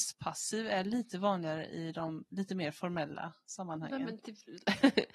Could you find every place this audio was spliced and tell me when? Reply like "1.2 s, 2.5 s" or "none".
none